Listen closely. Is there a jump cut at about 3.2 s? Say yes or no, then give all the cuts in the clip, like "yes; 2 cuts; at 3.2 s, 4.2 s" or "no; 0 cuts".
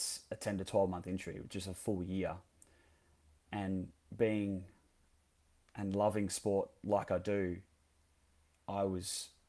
no; 0 cuts